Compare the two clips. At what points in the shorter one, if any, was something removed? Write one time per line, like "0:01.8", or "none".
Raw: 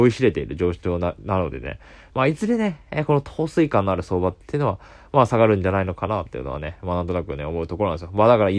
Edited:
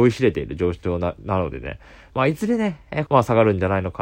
0:03.1